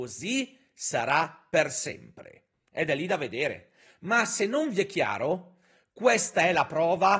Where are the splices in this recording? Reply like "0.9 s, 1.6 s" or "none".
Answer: none

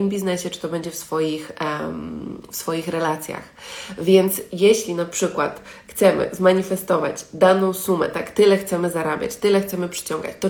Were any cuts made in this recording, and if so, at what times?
none

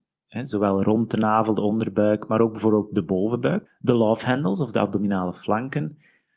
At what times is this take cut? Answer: 3.7 s

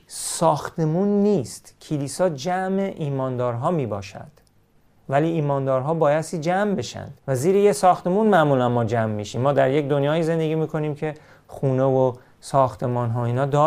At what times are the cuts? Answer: 7.2 s

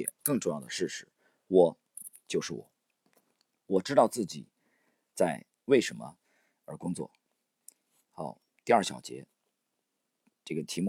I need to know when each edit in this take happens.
none

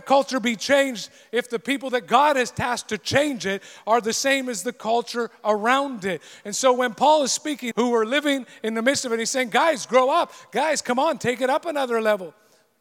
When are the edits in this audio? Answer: 7.7 s

